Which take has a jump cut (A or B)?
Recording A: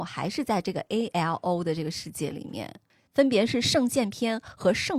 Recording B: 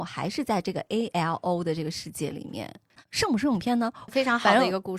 B